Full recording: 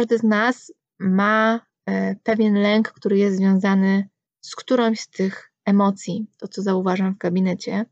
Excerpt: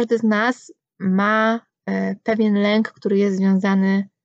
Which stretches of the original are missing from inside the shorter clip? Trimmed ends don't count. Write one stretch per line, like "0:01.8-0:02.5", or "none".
none

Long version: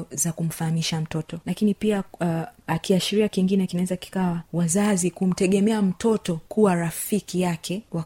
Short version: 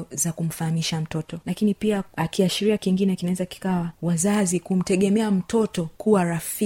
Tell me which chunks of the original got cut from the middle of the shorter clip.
0:02.1-0:02.6

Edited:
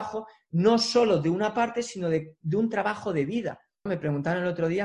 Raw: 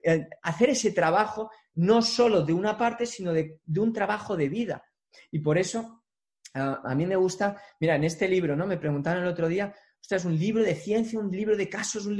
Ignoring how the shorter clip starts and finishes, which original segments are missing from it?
0:05.1-0:08.7

